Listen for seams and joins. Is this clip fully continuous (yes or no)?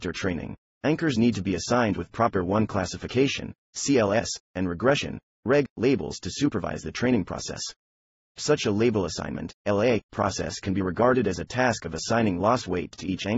yes